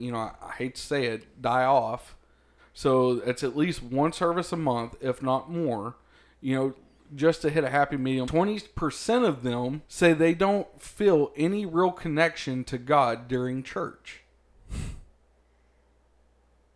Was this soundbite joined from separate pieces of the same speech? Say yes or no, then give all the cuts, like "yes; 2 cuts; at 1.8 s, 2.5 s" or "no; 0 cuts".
yes; 3 cuts; at 2.6 s, 8.2 s, 9.9 s